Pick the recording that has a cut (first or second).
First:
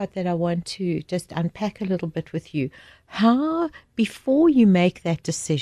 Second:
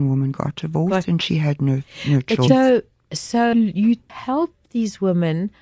second